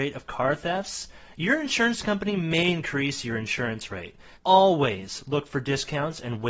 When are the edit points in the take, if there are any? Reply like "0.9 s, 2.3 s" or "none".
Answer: 4.3 s